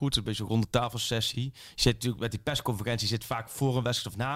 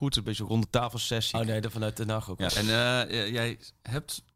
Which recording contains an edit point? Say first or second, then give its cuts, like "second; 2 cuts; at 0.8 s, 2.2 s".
second; 2 cuts; at 1.3 s, 2.5 s